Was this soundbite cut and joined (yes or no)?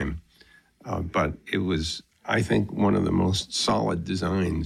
no